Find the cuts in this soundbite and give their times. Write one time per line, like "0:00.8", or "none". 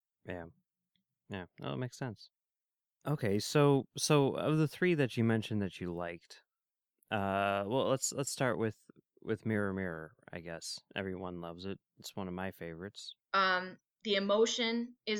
0:10.9
0:13.2

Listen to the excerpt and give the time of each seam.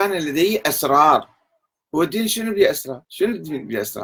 0:03.0

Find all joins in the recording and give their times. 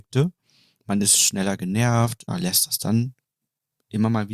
0:02.3

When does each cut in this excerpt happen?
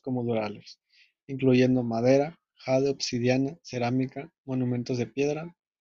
none

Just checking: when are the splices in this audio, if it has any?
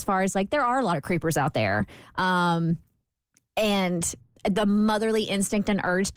0:04.4

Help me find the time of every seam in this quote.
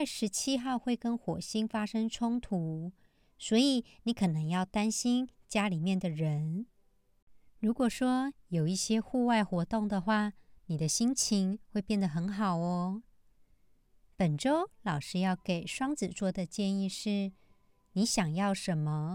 none

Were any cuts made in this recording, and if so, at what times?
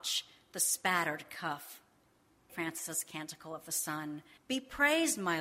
0:02.5
0:04.4

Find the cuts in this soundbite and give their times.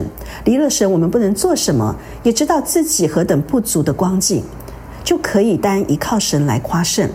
0:05.6

